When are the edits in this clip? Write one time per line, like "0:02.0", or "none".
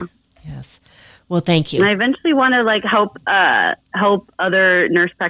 none